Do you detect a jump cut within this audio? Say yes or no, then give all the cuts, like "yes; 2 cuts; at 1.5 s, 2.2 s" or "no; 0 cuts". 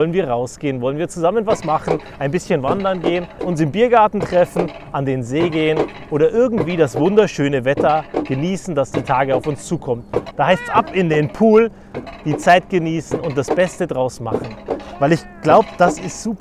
yes; 2 cuts; at 3.4 s, 10.3 s